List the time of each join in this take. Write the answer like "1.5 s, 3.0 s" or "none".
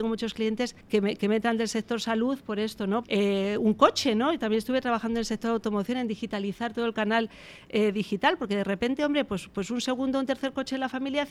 3.0 s